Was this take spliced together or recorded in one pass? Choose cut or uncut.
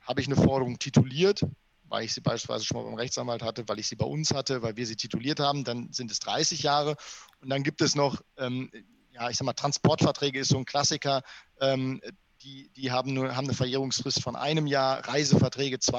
uncut